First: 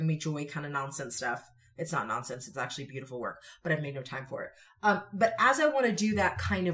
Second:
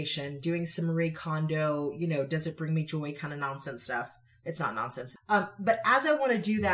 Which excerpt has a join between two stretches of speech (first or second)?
second